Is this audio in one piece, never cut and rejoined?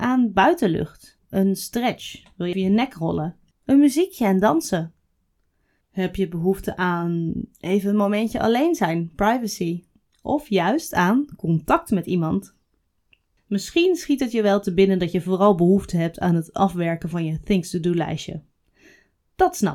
no; 2 cuts; at 2.5 s, 5.8 s

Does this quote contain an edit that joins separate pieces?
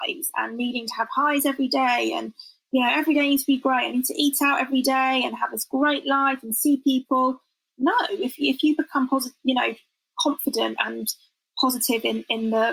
no; 0 cuts

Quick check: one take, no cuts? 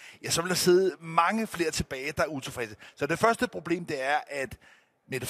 yes; 0 cuts

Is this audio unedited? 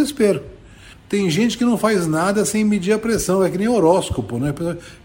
no; 1 cut; at 0.9 s

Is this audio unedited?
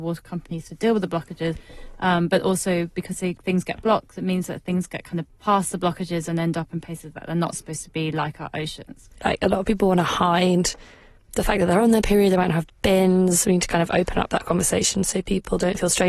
no; 1 cut; at 9.2 s

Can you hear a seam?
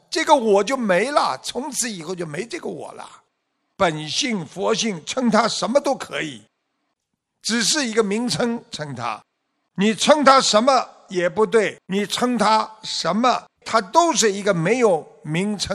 yes; 3 cuts; at 3.7 s, 11.8 s, 13.6 s

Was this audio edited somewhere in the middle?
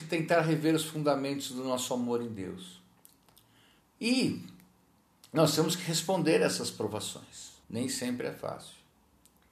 yes; 2 cuts; at 3.8 s, 7.6 s

